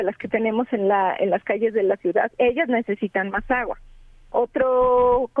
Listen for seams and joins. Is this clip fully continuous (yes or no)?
no